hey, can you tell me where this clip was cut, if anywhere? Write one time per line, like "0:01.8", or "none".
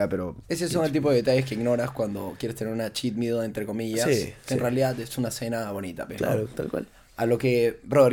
none

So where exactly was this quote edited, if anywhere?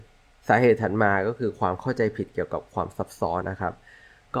0:03.4

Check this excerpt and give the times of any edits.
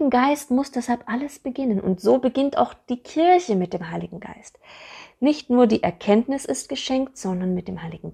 none

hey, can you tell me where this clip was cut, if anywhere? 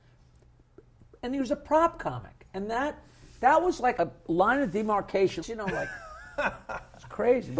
0:04.0
0:05.4

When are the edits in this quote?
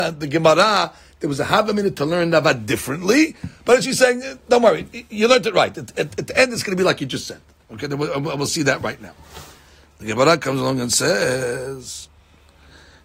none

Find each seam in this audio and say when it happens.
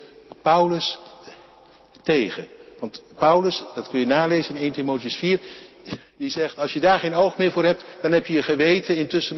none

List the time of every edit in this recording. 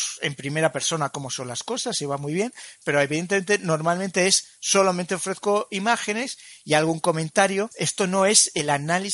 0:02.8

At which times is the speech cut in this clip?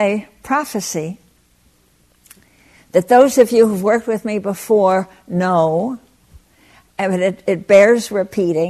none

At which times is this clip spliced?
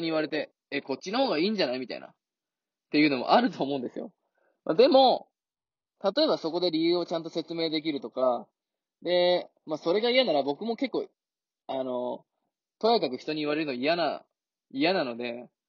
none

